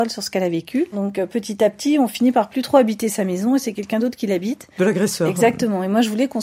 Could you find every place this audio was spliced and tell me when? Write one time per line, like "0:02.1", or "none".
0:00.9
0:04.8